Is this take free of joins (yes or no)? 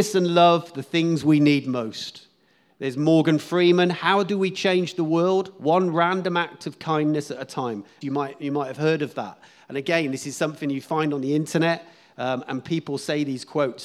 no